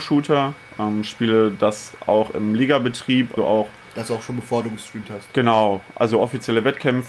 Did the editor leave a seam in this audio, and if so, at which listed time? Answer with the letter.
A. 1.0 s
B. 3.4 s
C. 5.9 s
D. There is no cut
B